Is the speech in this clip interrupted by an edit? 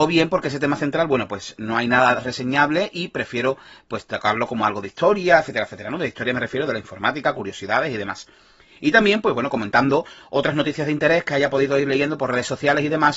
no; 0 cuts

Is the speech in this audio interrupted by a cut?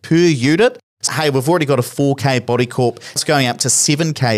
yes; 2 cuts; at 1.1 s, 3.2 s

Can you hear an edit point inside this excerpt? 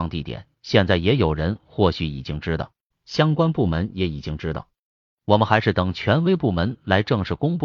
yes; 1 cut; at 2.9 s

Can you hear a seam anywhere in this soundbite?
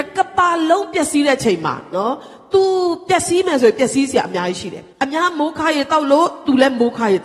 yes; 1 cut; at 4.9 s

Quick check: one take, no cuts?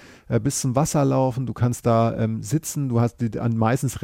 yes; 0 cuts

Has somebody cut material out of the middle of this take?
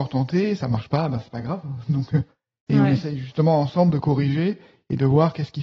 no; 0 cuts

